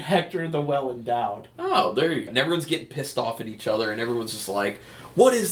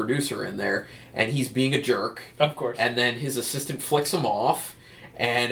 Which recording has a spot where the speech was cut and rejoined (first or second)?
first